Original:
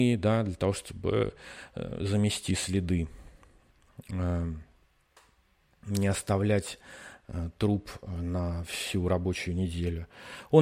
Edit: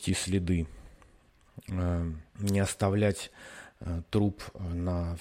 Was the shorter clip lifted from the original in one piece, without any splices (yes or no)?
no